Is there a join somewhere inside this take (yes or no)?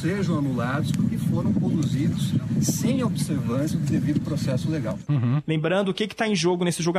no